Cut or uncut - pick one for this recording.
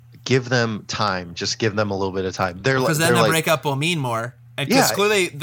uncut